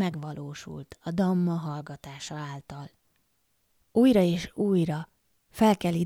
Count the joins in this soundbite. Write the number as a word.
one